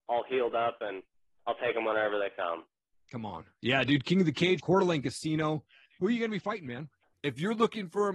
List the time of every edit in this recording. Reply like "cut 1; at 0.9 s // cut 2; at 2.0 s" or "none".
cut 1; at 4.6 s // cut 2; at 7.1 s